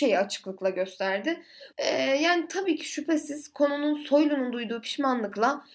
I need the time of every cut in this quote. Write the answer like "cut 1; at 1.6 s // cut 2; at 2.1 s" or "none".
cut 1; at 1.7 s